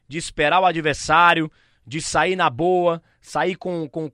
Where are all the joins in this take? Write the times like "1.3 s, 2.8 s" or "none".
none